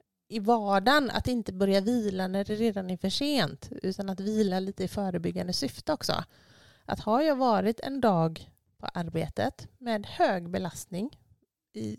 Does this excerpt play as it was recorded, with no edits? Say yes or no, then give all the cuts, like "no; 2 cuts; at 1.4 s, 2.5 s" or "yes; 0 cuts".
yes; 0 cuts